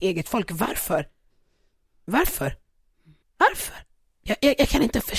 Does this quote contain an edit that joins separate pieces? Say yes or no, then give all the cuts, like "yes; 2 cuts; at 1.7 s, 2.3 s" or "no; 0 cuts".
yes; 1 cut; at 3.2 s